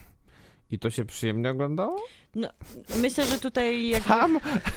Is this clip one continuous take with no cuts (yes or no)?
yes